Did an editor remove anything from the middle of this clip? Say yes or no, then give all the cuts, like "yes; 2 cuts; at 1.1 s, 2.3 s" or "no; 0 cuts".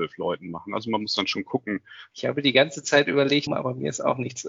yes; 2 cuts; at 2.1 s, 3.5 s